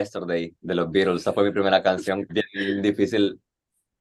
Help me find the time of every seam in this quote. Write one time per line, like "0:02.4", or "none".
0:02.3